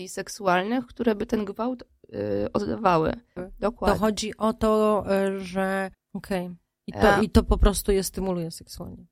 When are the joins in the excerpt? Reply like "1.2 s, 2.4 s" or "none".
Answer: 3.4 s, 5.9 s